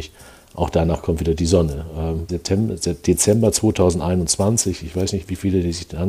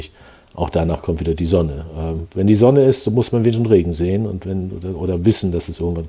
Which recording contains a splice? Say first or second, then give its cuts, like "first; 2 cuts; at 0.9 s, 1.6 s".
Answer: first; 1 cut; at 2.3 s